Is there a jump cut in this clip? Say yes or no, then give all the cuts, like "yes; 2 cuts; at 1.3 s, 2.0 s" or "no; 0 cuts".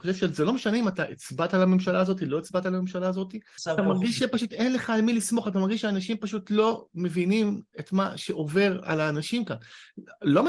yes; 1 cut; at 3.6 s